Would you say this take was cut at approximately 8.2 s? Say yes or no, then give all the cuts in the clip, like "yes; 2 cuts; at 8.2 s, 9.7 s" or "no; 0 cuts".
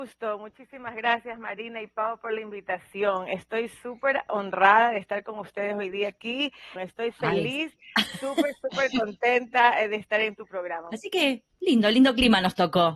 no; 2 cuts; at 6.8 s, 10.9 s